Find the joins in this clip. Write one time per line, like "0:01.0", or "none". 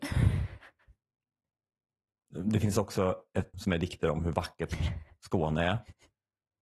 0:03.5